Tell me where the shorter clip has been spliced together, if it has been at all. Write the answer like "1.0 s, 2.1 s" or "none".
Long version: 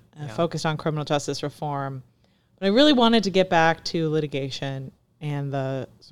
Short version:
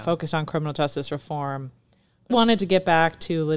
2.3 s